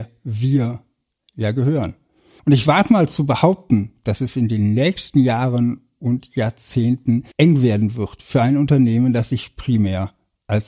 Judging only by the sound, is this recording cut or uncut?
cut